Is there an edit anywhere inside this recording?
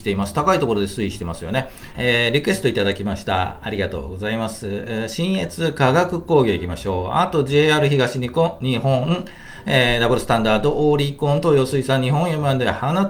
yes; 1 cut; at 1.9 s

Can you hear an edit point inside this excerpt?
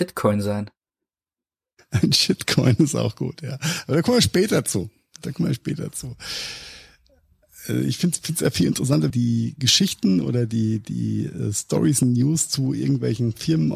yes; 1 cut; at 9.1 s

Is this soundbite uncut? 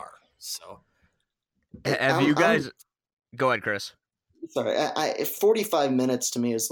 yes; 0 cuts

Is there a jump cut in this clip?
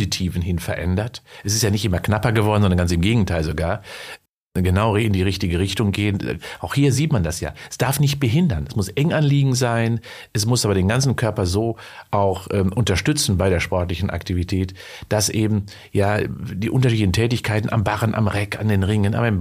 no; 0 cuts

